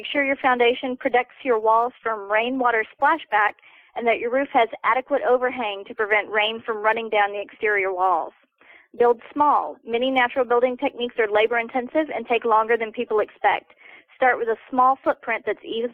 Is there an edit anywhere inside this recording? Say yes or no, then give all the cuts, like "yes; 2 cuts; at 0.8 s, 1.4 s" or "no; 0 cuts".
no; 0 cuts